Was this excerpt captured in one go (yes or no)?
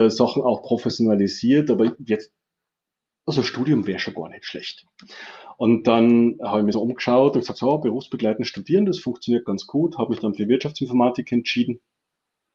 no